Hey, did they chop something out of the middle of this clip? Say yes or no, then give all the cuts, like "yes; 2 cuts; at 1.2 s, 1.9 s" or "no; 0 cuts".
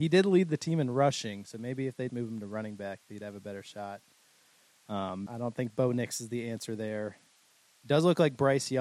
yes; 2 cuts; at 2.1 s, 5.3 s